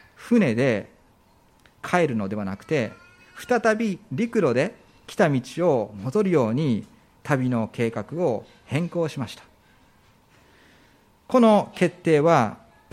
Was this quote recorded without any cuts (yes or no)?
yes